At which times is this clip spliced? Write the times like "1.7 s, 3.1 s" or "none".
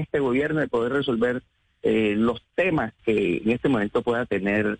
3.0 s